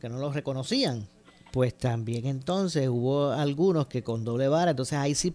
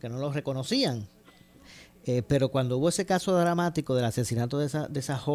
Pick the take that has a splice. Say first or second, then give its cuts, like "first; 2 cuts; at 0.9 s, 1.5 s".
first; 1 cut; at 1.5 s